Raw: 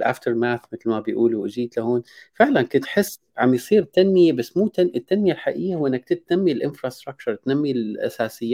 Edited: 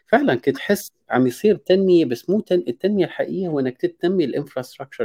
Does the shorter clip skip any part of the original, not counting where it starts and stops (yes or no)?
no